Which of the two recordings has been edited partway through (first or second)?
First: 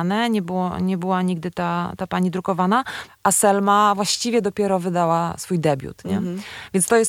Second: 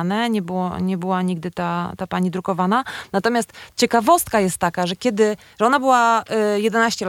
first